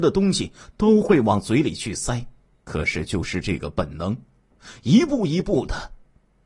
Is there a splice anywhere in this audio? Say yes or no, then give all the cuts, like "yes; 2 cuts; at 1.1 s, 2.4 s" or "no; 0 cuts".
yes; 1 cut; at 2.6 s